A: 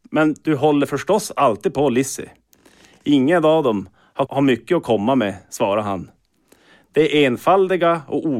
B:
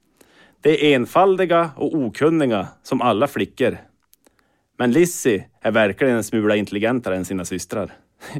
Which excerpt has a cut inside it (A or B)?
A